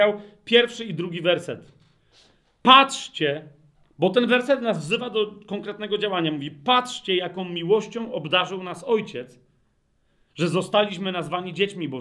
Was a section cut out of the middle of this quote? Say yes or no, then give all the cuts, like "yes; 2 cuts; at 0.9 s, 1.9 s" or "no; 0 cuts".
no; 0 cuts